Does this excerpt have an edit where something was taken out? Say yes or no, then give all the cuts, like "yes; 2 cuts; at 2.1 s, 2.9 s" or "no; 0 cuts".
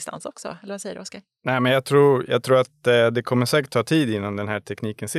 no; 0 cuts